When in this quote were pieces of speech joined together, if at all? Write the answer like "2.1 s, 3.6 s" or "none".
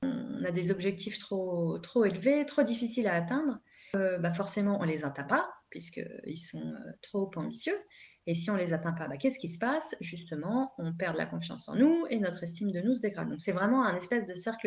none